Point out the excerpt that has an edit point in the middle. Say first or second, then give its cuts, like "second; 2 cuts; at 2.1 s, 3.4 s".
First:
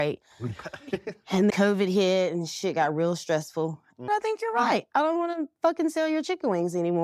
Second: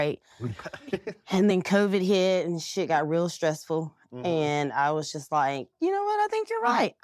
first; 2 cuts; at 1.5 s, 4.1 s